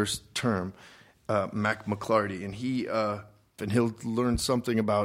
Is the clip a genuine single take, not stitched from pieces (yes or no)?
no